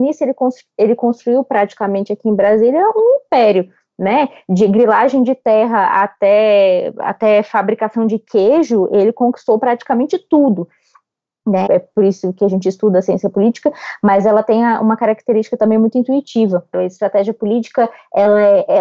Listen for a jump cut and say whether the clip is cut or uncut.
cut